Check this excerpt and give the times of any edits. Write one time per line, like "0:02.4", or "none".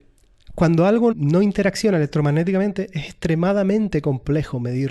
0:01.1